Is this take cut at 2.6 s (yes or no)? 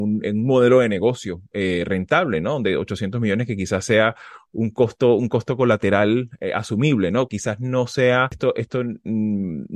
no